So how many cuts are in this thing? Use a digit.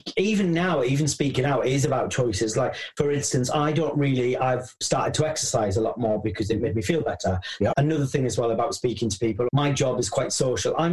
2